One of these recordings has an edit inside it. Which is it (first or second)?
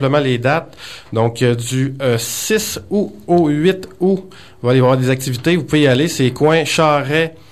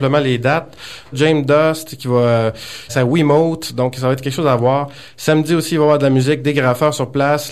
second